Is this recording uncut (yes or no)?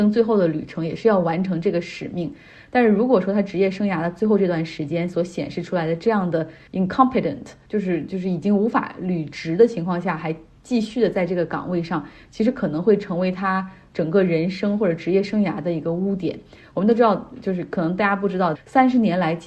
no